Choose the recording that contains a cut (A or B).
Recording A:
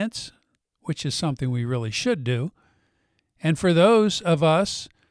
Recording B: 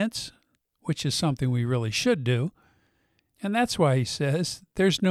B